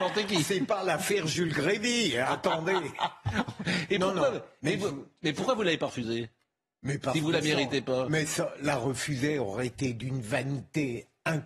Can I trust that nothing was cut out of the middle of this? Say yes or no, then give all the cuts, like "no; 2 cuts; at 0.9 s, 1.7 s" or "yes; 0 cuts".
yes; 0 cuts